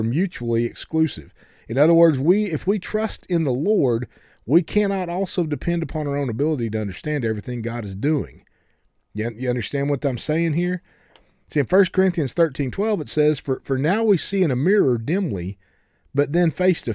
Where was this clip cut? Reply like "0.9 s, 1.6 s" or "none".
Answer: none